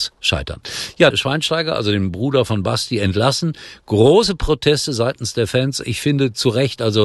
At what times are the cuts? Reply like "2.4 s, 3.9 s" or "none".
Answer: 1.1 s